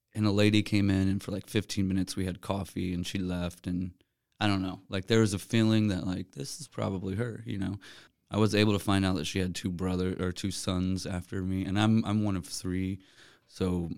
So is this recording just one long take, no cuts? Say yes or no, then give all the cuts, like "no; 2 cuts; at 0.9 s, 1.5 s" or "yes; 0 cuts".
yes; 0 cuts